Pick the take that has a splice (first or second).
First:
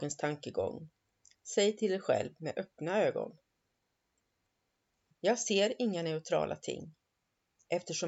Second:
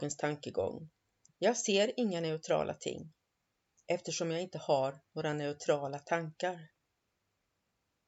second